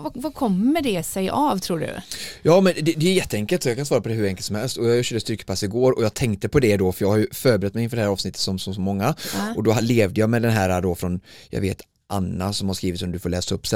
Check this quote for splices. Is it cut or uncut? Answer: uncut